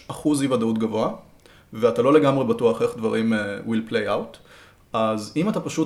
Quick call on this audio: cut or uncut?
uncut